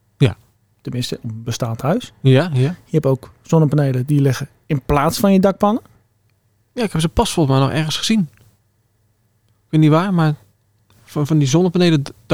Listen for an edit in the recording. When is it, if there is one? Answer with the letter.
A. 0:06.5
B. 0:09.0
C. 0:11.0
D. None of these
D